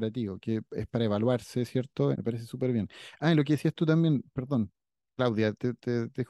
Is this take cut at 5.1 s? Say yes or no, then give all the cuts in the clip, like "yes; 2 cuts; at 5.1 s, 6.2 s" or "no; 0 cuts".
no; 1 cut; at 2.1 s